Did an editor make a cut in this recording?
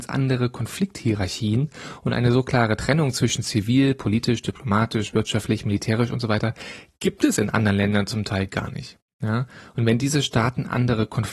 no; 0 cuts

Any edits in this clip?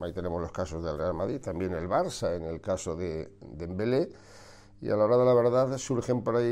no; 0 cuts

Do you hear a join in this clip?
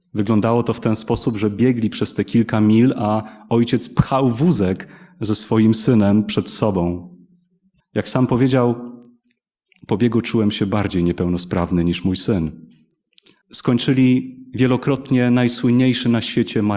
yes; 2 cuts; at 7.8 s, 13.4 s

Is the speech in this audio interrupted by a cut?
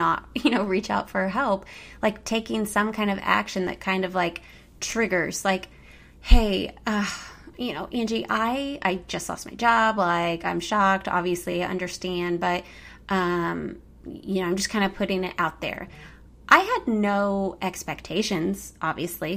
no; 0 cuts

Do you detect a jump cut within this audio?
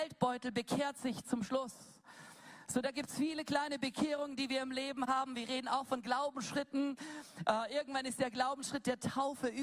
no; 0 cuts

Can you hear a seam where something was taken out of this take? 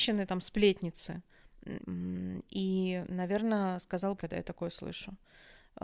yes; 2 cuts; at 1.8 s, 4.2 s

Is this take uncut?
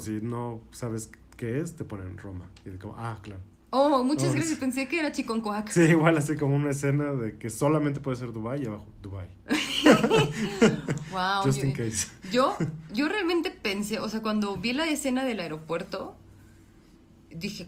yes; 0 cuts

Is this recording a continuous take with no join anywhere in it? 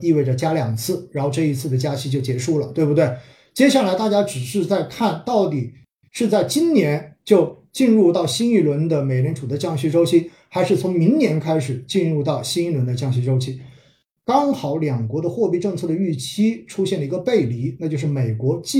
no; 1 cut; at 14.2 s

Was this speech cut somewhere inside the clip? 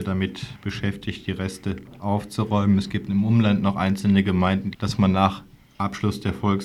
yes; 1 cut; at 4.7 s

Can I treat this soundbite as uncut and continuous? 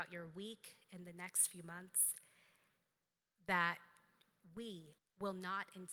no; 1 cut; at 5.0 s

